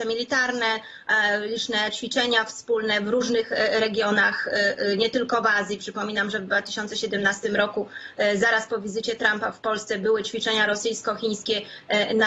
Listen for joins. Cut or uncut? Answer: uncut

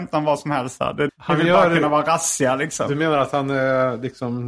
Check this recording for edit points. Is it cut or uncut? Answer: cut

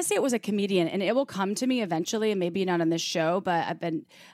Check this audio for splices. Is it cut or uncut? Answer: uncut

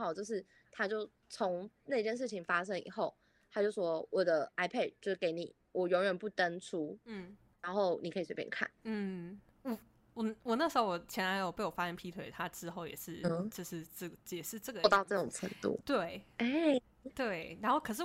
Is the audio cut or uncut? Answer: uncut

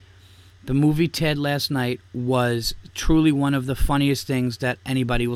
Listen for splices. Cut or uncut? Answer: uncut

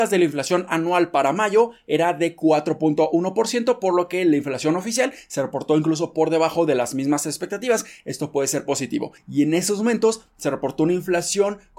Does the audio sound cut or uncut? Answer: cut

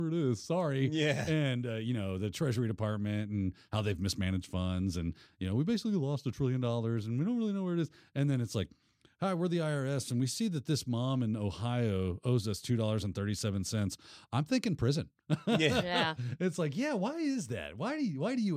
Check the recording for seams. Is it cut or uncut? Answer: uncut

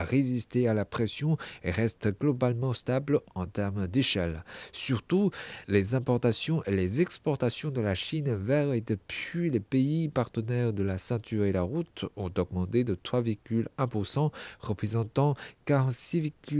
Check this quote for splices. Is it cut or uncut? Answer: uncut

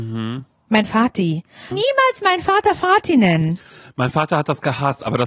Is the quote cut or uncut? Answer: cut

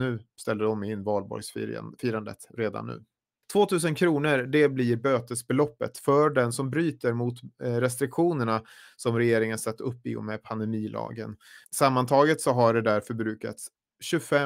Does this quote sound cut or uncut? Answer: cut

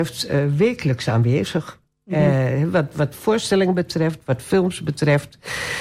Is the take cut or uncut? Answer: uncut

